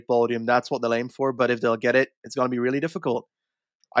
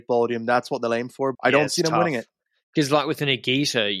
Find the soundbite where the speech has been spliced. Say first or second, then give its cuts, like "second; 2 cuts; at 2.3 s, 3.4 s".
second; 1 cut; at 1.3 s